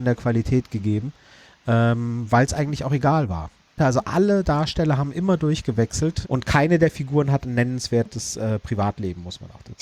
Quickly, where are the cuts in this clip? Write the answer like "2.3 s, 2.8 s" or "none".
3.8 s, 6.2 s